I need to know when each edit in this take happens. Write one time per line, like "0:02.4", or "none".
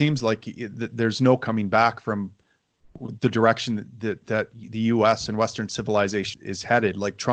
0:06.3